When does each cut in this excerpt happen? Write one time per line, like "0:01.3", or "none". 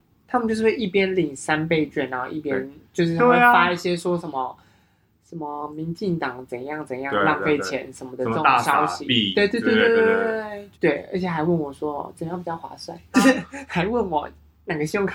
0:10.7
0:13.1